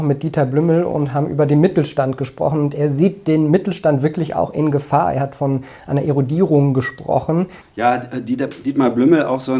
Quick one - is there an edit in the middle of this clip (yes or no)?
yes